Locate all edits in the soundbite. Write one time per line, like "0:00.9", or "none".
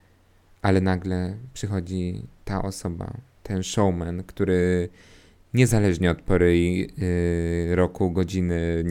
none